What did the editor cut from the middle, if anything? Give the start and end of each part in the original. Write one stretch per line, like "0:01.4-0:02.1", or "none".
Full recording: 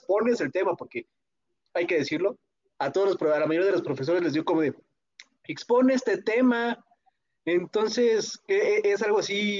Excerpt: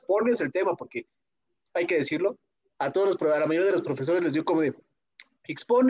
none